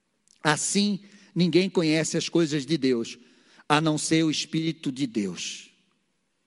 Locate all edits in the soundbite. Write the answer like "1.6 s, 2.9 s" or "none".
none